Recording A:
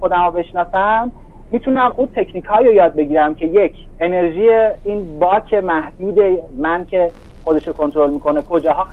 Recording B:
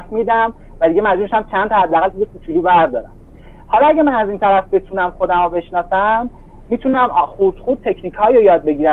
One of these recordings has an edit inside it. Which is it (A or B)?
A